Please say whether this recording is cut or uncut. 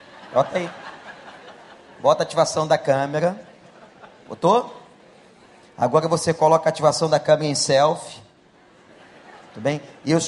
uncut